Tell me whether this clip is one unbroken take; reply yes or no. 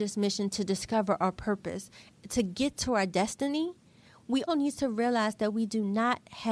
no